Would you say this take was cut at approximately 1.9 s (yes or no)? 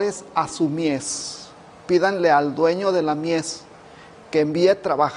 yes